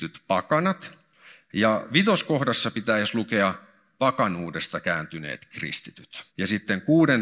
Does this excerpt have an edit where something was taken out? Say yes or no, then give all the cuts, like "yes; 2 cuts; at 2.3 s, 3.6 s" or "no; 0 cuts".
yes; 1 cut; at 6.3 s